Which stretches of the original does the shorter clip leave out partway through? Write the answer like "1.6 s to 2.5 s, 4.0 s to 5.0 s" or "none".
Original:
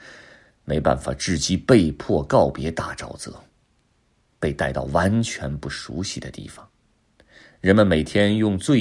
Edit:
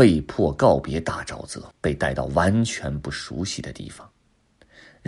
3.4 s to 4.3 s